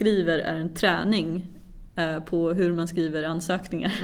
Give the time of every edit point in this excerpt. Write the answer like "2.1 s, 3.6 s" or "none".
none